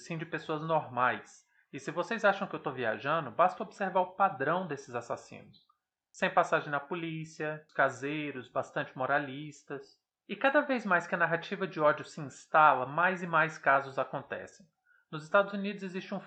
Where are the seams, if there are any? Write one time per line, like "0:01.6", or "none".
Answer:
0:07.7
0:10.2